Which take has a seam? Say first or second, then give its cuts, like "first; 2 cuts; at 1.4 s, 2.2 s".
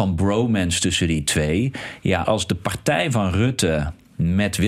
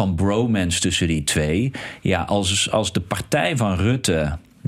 first; 1 cut; at 2.2 s